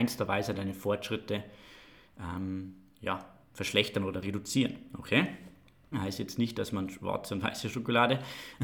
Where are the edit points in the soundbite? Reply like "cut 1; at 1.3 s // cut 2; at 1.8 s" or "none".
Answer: cut 1; at 5.9 s